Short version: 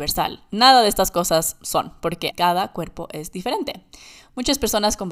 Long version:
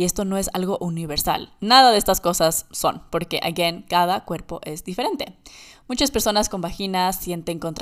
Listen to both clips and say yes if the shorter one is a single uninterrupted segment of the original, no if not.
no